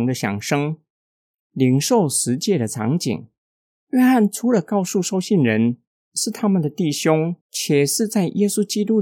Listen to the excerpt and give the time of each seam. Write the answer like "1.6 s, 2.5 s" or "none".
1.3 s, 3.7 s, 7.4 s